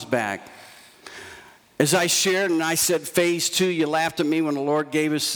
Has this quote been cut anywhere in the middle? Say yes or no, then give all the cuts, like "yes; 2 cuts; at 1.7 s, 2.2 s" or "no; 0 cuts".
no; 0 cuts